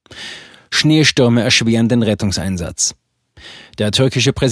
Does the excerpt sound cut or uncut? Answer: uncut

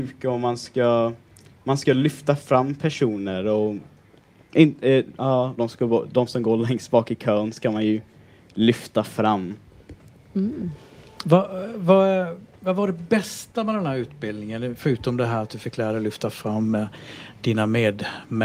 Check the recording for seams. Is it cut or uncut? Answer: cut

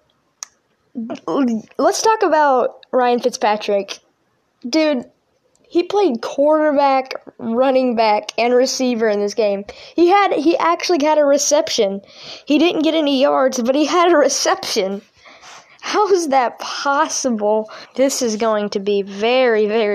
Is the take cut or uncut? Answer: cut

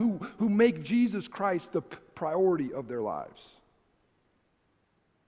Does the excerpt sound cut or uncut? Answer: uncut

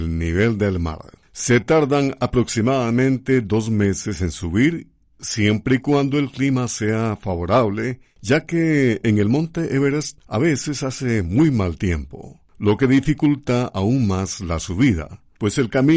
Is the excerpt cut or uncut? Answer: uncut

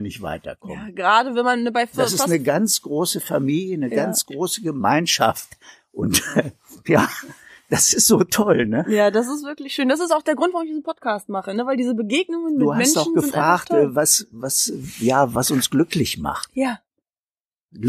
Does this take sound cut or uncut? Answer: uncut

